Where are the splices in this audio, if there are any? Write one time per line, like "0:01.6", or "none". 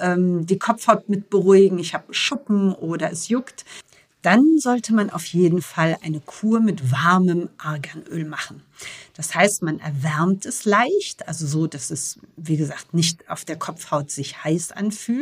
none

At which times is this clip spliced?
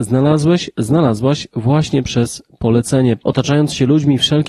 0:03.2

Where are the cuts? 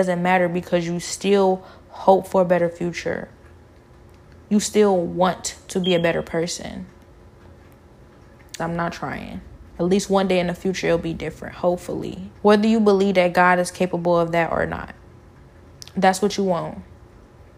0:08.6
0:12.4

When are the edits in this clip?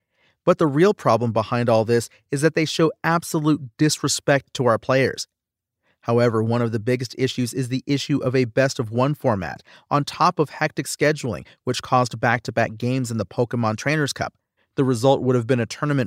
0:14.6

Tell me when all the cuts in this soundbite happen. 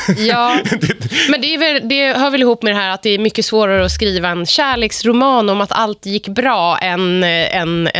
none

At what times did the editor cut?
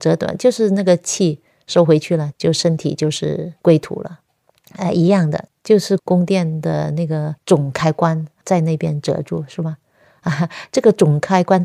0:02.3
0:05.5

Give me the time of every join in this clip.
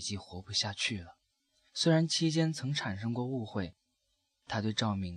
0:01.7

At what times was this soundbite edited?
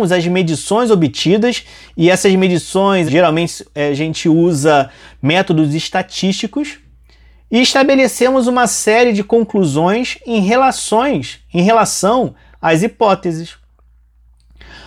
0:03.1

